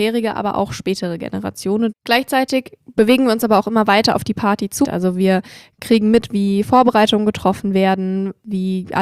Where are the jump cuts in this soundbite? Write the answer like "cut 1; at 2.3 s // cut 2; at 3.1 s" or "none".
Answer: cut 1; at 1.9 s // cut 2; at 4.8 s